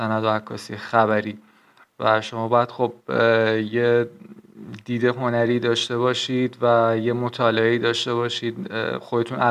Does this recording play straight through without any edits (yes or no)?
yes